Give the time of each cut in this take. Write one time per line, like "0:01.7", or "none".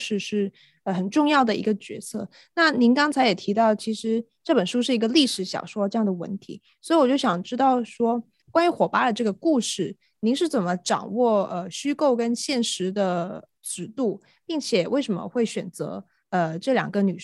none